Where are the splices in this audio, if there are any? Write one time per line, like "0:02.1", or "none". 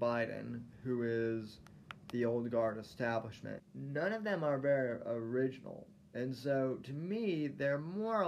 0:03.6